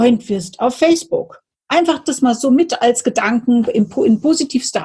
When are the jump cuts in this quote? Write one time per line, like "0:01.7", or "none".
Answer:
none